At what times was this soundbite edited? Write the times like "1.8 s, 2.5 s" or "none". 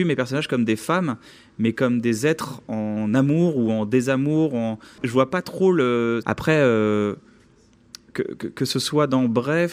5.0 s, 6.2 s